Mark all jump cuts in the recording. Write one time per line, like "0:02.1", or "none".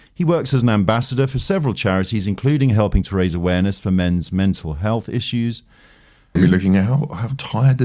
0:06.4